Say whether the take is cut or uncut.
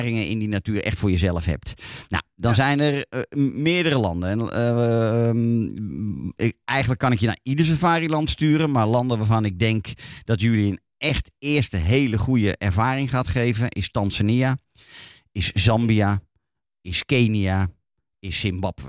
uncut